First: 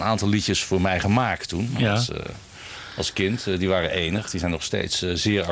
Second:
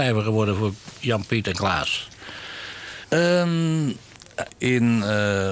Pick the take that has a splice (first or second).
second